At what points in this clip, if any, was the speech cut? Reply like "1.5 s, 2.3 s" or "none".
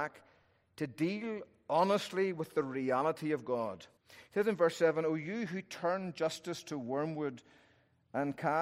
4.0 s